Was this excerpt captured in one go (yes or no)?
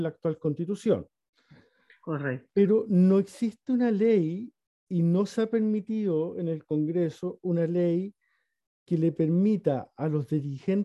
yes